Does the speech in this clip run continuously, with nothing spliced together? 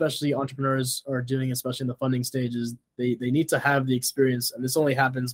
yes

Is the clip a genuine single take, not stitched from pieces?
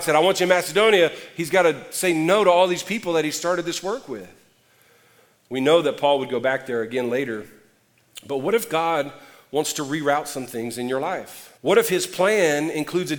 no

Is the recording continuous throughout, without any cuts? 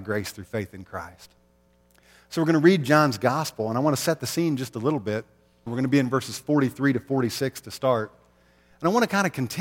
no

